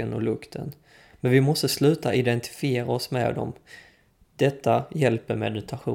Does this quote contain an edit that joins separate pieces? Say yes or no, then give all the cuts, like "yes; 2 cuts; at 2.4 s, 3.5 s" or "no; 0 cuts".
yes; 1 cut; at 1.1 s